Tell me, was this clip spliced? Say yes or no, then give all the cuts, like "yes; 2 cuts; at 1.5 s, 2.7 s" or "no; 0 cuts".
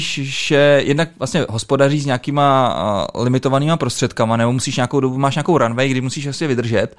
no; 0 cuts